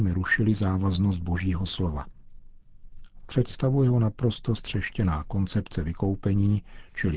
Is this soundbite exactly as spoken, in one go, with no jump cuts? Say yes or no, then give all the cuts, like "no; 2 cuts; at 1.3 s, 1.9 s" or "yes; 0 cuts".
no; 1 cut; at 3.2 s